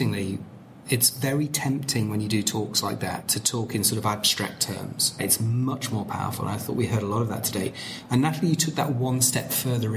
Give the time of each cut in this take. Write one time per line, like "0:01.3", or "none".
0:05.2